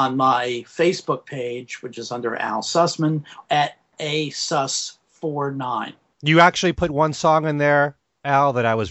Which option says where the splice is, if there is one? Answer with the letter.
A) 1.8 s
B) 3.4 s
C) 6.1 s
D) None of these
B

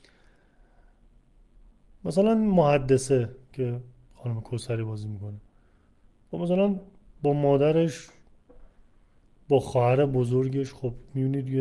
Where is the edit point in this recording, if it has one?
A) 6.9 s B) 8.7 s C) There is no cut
C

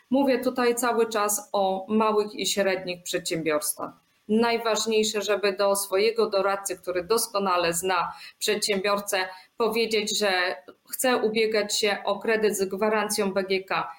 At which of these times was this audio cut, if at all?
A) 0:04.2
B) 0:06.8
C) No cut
A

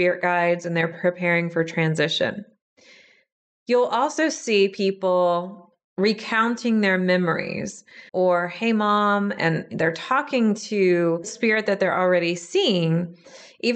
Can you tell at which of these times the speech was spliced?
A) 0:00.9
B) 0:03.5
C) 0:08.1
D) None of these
C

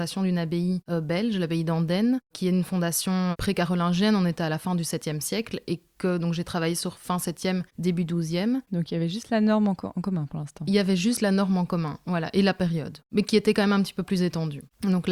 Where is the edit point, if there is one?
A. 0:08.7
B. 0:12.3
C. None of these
A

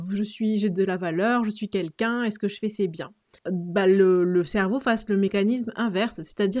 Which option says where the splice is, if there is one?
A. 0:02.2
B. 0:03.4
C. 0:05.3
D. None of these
B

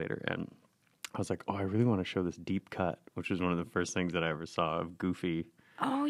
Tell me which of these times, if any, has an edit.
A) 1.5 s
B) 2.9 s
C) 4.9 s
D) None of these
D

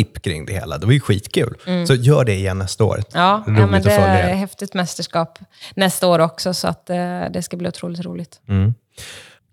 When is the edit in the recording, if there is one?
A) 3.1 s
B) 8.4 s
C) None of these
A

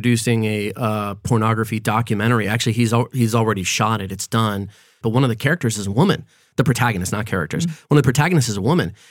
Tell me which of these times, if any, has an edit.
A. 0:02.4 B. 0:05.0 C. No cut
B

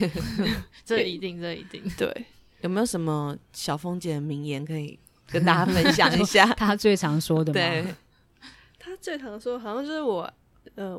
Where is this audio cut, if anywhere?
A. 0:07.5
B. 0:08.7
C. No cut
C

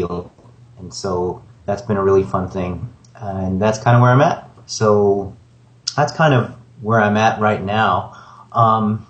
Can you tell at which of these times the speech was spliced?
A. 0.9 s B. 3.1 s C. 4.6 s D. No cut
C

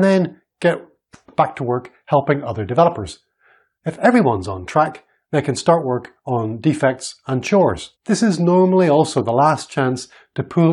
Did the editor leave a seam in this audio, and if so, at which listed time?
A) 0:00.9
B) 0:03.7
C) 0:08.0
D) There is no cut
C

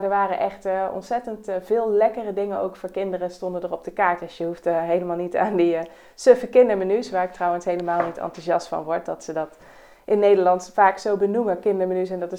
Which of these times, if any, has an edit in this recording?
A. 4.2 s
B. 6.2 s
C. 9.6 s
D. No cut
D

